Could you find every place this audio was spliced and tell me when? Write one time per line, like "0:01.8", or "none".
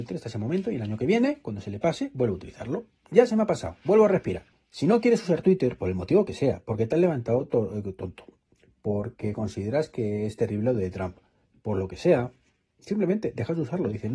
0:04.5